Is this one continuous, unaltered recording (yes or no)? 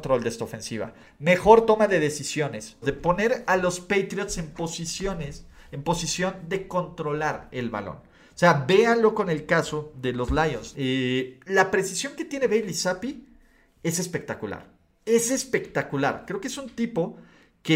no